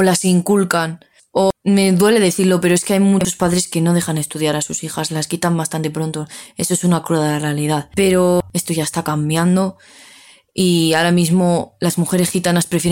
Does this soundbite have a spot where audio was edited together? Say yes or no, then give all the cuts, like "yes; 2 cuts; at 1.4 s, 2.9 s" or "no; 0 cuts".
no; 0 cuts